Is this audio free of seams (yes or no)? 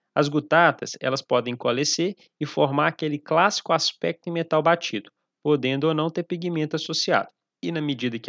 yes